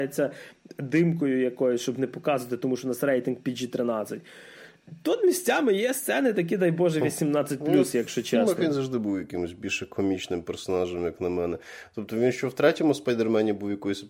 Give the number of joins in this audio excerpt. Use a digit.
0